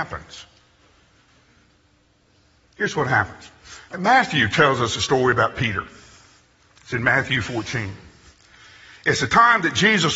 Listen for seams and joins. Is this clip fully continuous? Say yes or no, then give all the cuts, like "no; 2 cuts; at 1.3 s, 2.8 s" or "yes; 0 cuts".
no; 1 cut; at 3.9 s